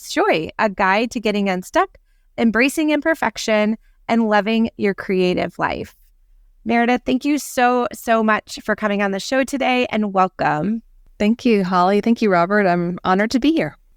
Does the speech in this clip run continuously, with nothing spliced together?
yes; 0 cuts

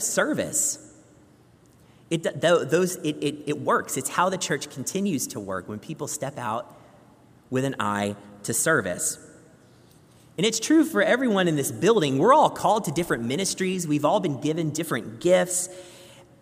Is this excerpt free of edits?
yes; 0 cuts

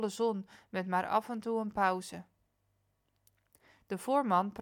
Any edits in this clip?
no; 0 cuts

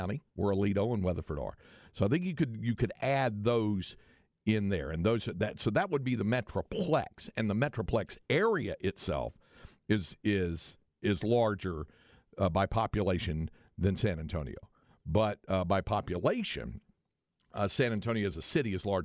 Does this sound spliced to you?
no; 0 cuts

